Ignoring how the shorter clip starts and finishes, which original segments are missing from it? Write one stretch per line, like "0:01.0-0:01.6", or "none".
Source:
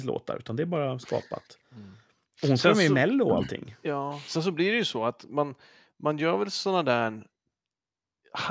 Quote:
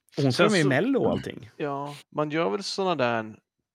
0:04.2-0:05.9